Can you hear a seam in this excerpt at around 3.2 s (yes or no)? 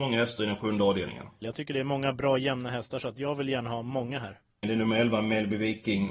no